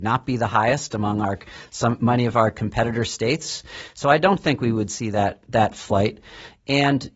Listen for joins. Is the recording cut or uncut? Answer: uncut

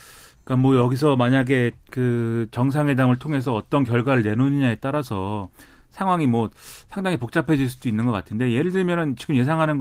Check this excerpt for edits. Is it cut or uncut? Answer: uncut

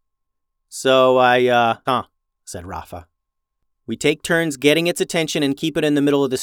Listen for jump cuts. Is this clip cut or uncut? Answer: cut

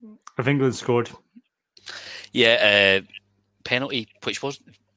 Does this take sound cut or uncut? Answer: uncut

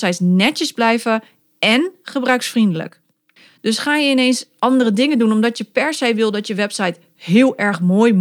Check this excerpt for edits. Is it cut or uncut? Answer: uncut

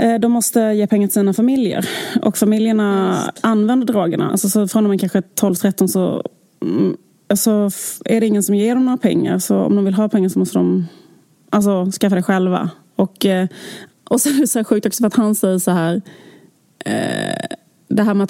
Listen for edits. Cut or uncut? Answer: cut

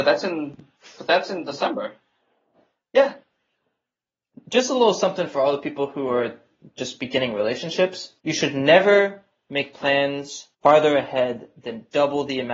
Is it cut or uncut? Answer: cut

